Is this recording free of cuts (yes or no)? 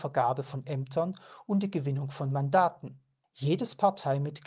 no